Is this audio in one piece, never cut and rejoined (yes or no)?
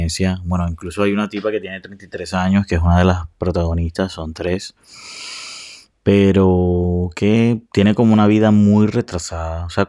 yes